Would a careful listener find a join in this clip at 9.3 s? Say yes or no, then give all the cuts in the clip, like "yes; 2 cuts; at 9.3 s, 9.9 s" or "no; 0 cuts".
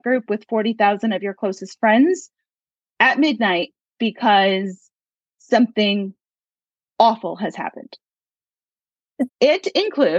yes; 1 cut; at 9.3 s